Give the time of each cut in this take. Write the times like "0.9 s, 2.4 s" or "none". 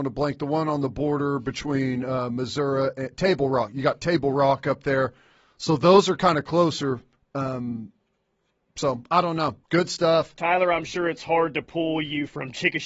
9.6 s

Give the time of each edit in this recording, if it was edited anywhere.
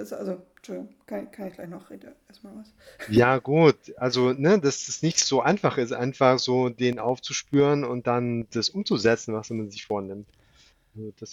none

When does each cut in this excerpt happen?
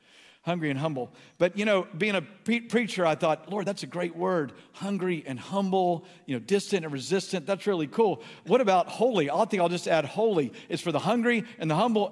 none

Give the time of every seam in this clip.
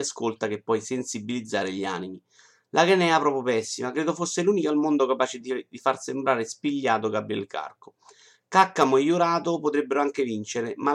none

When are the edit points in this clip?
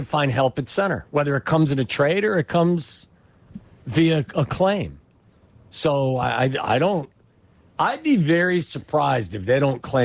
none

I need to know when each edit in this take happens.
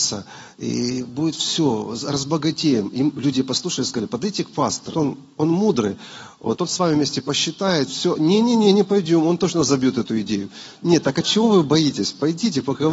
4.9 s

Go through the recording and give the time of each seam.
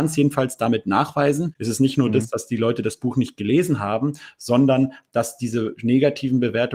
1.5 s

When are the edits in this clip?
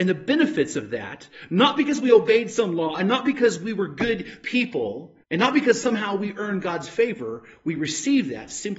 5.2 s

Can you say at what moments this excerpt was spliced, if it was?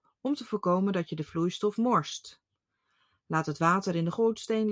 none

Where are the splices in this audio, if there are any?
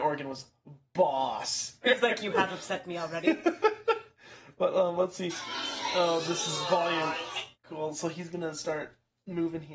1.8 s, 7.5 s

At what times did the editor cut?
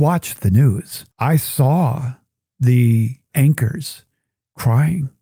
1.1 s

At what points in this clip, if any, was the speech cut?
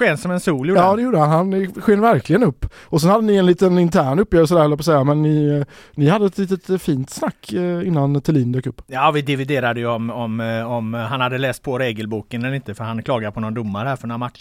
none

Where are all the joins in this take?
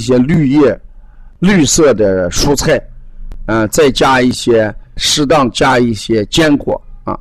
5.0 s

